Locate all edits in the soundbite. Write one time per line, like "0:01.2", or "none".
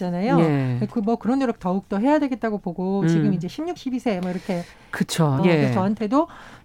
0:03.8
0:05.4